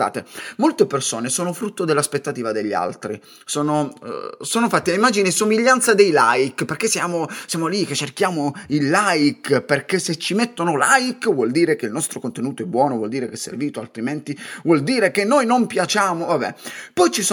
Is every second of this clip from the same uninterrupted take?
yes; 0 cuts

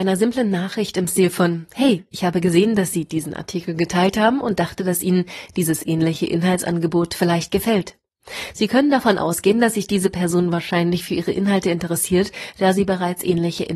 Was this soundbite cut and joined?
no; 0 cuts

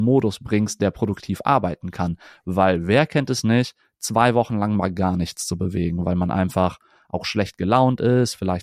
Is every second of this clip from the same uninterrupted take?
yes; 0 cuts

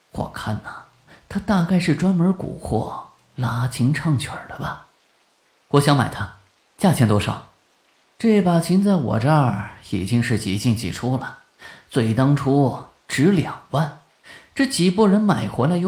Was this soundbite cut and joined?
no; 0 cuts

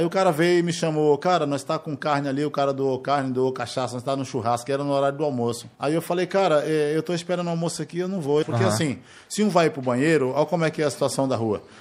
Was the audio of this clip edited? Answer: yes; 2 cuts; at 5.7 s, 8.4 s

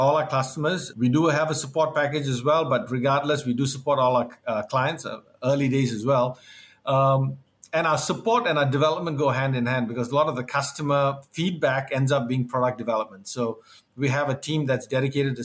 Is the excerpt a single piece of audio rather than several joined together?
yes; 0 cuts

